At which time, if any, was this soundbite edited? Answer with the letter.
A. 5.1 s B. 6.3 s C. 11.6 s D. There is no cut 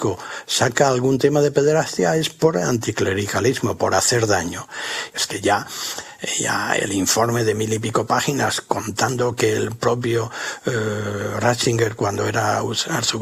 A